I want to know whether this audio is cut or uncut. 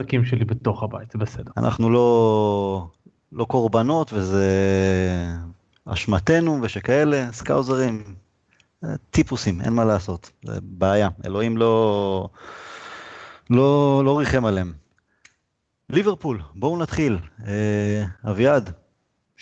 cut